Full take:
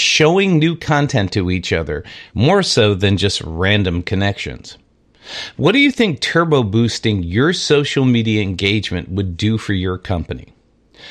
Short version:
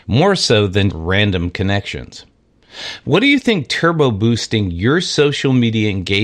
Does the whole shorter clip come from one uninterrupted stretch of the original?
no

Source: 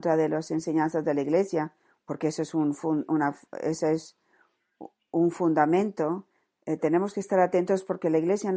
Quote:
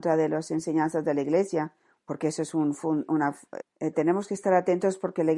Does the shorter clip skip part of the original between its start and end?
yes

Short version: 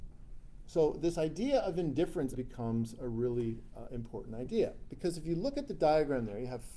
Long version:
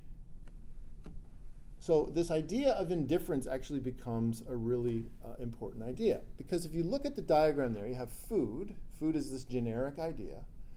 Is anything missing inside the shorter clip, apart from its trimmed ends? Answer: yes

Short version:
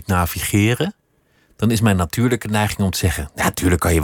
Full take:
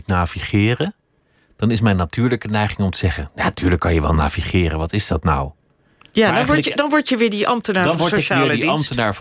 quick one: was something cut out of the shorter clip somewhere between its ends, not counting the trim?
no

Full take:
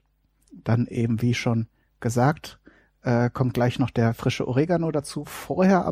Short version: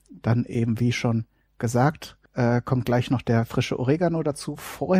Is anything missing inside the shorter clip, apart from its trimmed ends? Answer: yes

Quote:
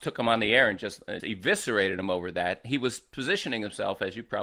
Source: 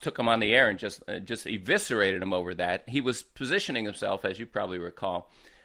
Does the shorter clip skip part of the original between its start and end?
yes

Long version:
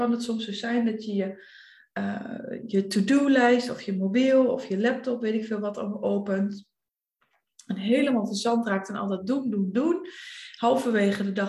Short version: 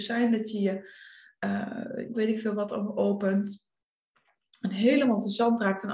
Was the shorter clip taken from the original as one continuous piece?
no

